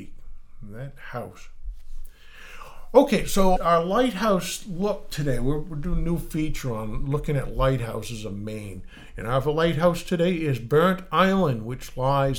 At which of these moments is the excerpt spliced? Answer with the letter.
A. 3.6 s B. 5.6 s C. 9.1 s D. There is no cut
A